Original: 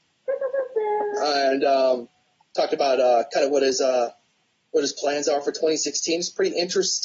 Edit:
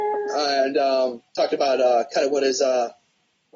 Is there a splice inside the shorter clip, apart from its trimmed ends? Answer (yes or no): yes